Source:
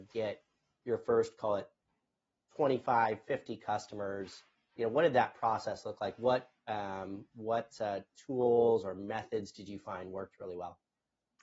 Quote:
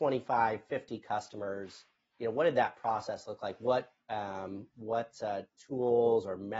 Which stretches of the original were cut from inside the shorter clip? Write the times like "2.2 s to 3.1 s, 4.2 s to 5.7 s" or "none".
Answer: none